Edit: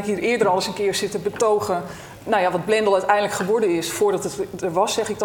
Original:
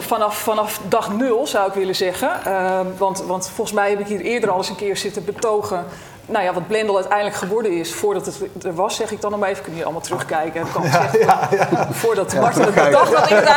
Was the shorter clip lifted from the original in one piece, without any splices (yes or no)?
yes